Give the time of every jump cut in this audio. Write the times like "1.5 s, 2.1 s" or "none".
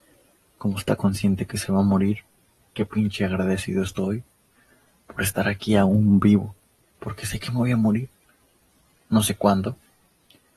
2.7 s, 6.9 s